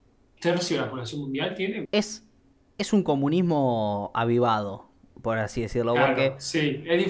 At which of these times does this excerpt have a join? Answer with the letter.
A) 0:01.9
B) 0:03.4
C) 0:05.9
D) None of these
A